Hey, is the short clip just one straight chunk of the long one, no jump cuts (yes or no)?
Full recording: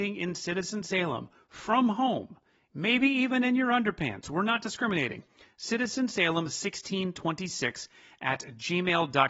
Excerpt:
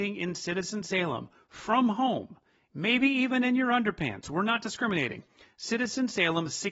yes